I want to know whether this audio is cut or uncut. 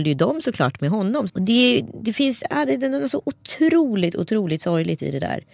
cut